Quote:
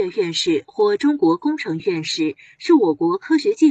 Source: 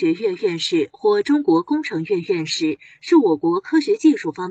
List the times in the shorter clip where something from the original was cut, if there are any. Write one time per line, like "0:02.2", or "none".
0:01.8